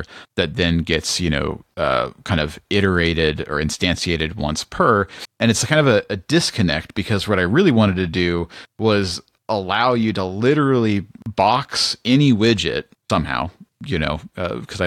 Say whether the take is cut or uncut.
uncut